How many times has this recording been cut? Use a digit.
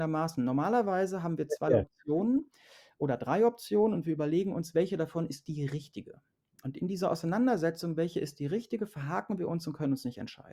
0